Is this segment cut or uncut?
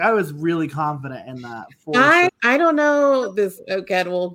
cut